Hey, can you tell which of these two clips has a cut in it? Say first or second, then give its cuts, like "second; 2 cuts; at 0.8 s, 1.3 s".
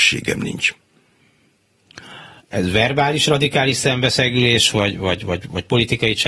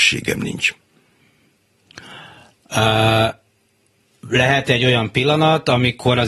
first; 1 cut; at 2.4 s